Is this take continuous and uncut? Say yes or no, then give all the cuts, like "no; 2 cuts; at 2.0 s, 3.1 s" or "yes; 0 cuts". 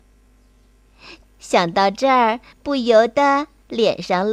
no; 1 cut; at 1.2 s